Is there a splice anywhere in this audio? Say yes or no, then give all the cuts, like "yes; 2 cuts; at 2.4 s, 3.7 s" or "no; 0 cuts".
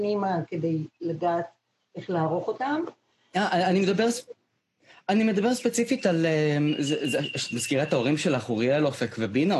no; 0 cuts